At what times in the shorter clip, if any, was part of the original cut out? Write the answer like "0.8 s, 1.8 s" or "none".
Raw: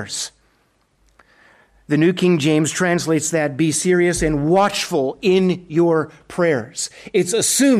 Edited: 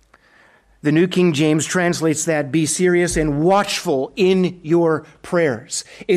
none